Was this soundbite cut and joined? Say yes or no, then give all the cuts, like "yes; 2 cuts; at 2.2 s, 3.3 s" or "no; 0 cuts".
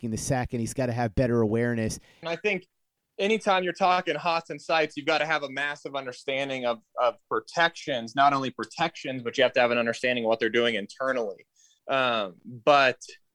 yes; 2 cuts; at 2.2 s, 11.8 s